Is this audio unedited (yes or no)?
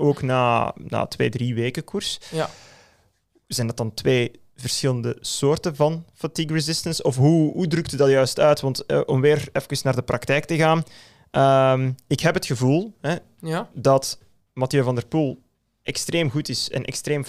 yes